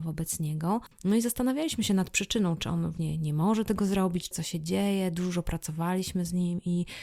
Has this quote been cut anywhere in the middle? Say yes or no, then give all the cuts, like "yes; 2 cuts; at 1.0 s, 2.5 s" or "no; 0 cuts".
yes; 2 cuts; at 0.9 s, 4.3 s